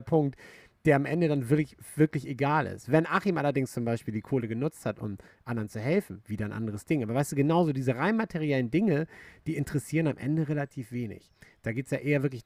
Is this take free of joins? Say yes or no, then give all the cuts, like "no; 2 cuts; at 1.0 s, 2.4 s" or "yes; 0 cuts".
yes; 0 cuts